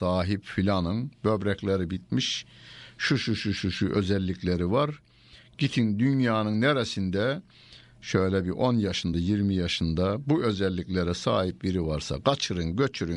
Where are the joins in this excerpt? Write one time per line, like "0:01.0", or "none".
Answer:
0:09.1